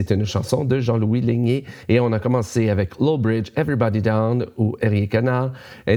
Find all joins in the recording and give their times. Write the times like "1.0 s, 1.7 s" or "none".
none